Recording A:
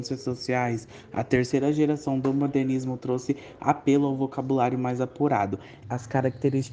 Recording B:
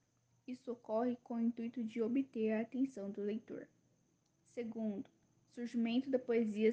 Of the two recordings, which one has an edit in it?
A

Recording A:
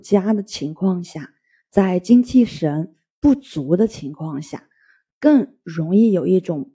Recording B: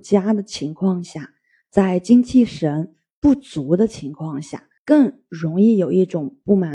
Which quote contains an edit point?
B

